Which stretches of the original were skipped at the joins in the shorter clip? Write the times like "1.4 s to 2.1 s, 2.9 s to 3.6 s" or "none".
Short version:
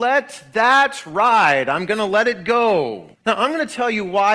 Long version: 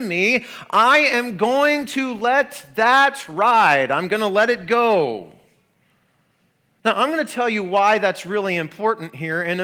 5.4 s to 6.7 s

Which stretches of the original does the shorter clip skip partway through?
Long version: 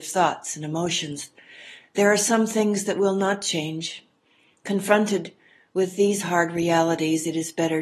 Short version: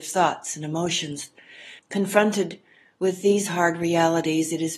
1.8 s to 4.5 s

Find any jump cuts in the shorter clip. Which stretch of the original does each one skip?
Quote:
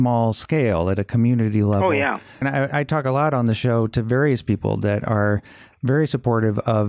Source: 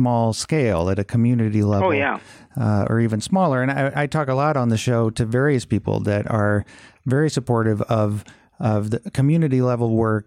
2.4 s to 3.6 s

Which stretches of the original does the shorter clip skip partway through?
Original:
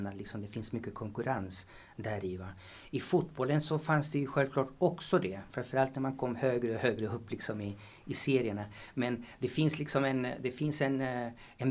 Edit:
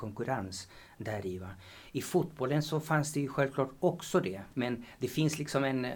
5.5 s to 8.9 s

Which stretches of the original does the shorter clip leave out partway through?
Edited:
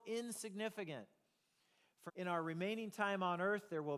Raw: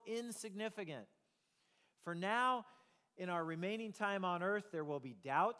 2.1 s to 3.1 s

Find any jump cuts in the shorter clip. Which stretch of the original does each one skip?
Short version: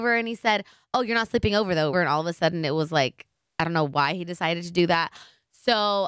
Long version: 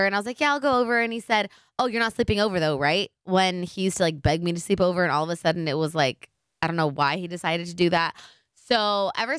2.8 s to 5.0 s

